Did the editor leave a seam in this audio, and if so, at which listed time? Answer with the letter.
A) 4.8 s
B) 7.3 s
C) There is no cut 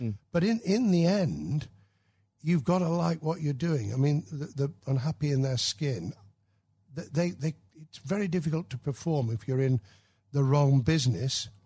A